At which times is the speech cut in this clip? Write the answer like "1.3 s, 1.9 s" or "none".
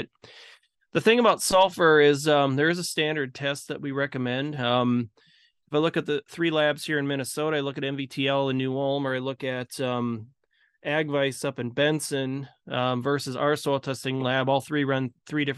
4.6 s